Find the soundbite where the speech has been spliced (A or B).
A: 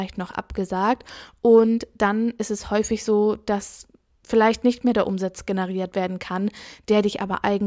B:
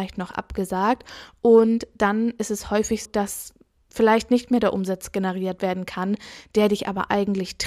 B